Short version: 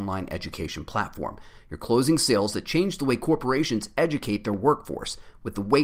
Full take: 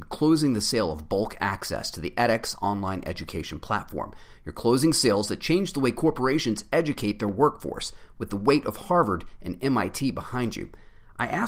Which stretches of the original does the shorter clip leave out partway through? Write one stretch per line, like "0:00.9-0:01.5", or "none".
none